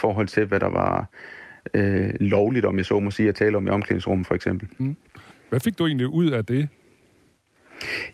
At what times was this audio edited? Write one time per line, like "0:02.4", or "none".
0:05.3